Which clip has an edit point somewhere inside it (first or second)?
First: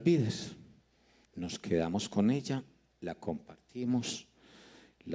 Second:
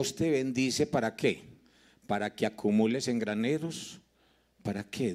first